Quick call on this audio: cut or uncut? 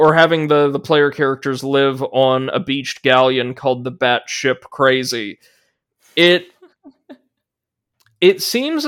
uncut